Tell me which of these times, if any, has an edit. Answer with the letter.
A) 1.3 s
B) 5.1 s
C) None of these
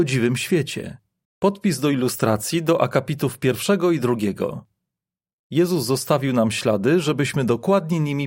A